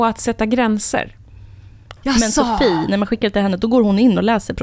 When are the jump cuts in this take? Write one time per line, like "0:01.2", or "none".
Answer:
0:02.0